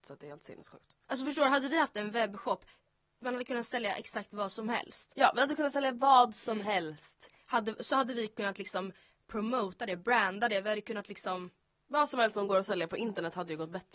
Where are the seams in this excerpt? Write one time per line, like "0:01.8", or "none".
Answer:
0:01.0